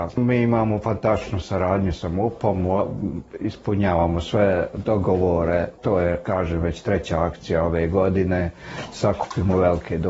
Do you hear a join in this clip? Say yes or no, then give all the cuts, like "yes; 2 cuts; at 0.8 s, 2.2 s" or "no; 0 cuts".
no; 0 cuts